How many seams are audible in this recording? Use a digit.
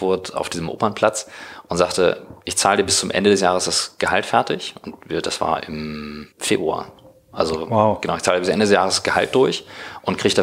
1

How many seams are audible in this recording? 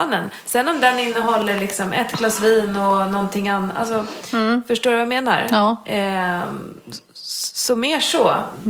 0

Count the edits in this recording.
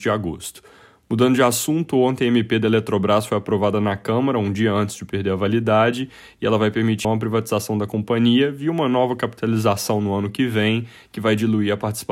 1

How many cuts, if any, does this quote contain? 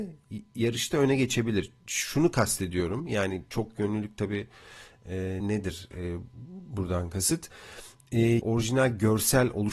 2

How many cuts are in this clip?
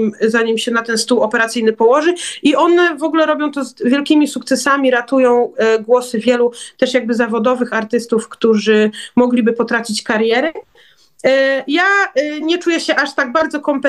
1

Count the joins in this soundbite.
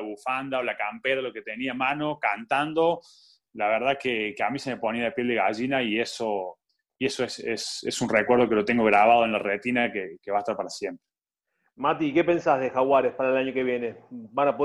0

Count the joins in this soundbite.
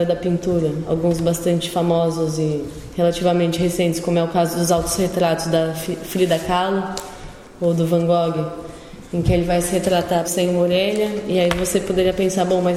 1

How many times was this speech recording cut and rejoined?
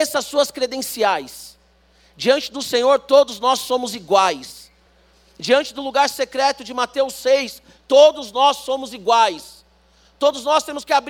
0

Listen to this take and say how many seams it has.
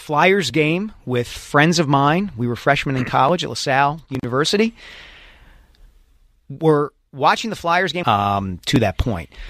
1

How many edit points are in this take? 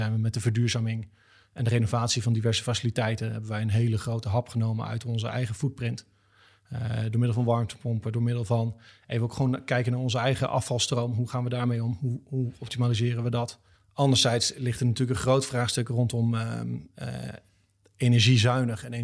1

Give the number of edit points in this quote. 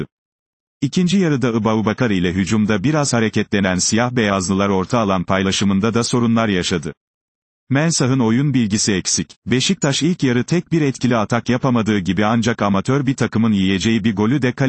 1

